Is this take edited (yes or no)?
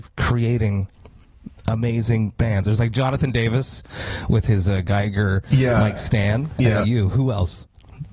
yes